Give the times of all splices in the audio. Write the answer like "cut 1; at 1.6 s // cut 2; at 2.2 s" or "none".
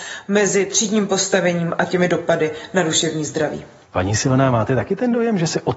cut 1; at 3.8 s